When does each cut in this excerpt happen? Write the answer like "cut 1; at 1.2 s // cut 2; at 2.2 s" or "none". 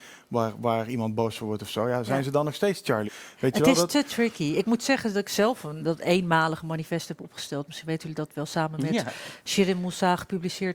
cut 1; at 3.1 s // cut 2; at 5.8 s